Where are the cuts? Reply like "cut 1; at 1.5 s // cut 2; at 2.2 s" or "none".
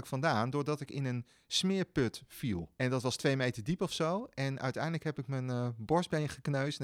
cut 1; at 2.8 s

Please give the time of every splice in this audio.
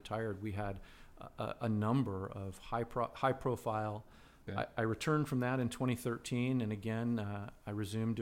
cut 1; at 4.5 s

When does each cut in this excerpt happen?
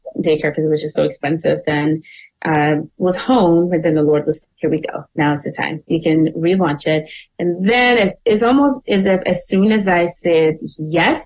cut 1; at 4.4 s

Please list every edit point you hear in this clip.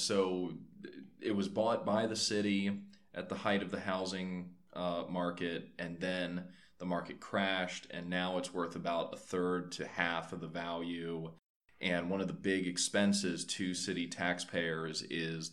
none

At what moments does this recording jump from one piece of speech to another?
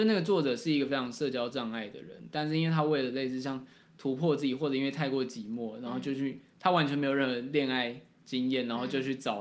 none

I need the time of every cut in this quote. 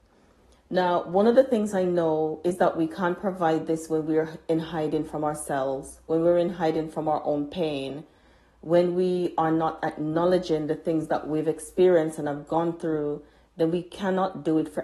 none

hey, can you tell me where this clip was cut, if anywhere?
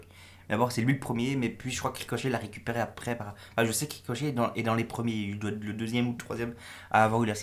none

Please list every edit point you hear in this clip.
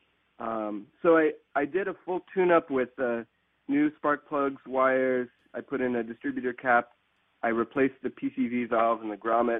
none

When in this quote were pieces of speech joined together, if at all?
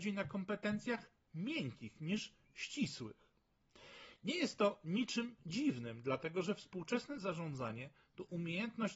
none

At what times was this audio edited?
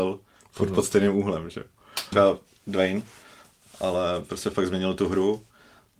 cut 1; at 2.1 s

